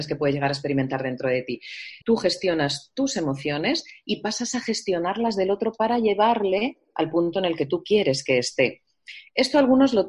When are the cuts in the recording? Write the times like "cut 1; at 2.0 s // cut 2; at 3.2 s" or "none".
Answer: cut 1; at 2.0 s